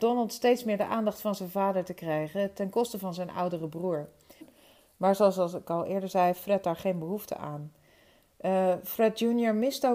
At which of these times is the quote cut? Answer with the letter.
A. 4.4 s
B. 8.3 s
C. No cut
A